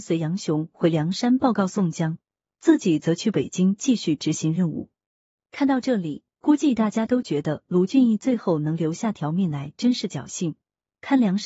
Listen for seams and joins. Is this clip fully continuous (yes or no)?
yes